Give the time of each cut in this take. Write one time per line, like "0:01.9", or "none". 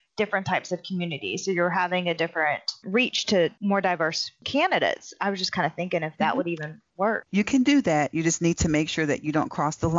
none